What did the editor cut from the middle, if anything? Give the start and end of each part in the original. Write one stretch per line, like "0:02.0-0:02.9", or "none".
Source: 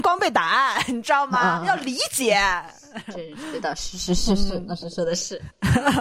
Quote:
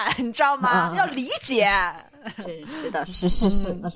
0:03.8-0:03.9